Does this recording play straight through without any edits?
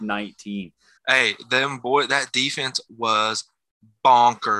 no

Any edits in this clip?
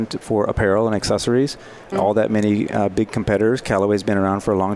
yes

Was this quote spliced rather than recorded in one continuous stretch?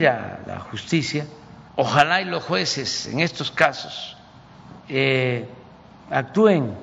yes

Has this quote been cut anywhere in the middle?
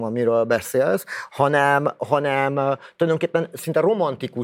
no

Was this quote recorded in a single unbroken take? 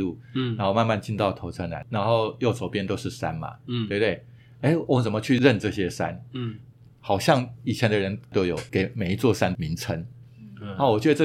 yes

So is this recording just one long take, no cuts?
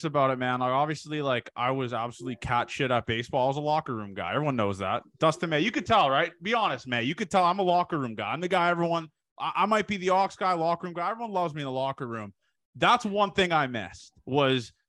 yes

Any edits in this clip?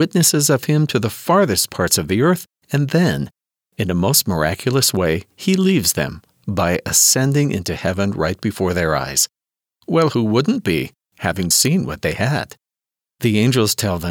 yes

